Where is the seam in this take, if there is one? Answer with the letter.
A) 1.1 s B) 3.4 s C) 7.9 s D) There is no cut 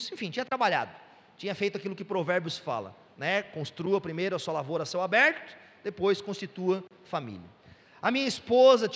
D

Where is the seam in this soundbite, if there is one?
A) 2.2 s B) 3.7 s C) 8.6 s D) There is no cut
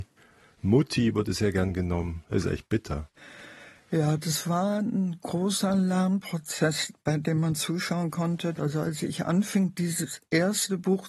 C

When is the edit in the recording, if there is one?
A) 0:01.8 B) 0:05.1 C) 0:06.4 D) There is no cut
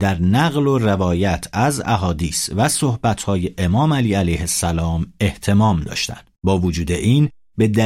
C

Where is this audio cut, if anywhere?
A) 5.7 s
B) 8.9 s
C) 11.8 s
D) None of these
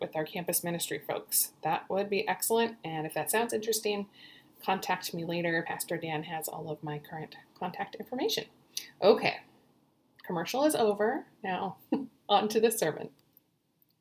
D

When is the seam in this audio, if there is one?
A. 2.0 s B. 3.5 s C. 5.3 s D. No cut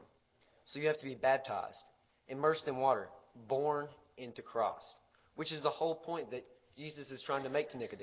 D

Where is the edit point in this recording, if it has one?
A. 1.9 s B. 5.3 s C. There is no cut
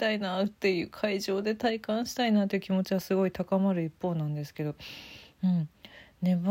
B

